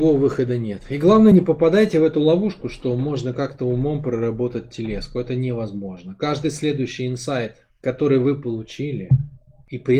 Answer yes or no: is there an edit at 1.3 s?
no